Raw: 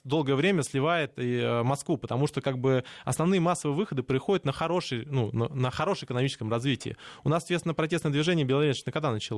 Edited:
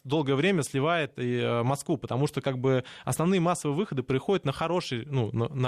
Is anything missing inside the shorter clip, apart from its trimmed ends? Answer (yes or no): no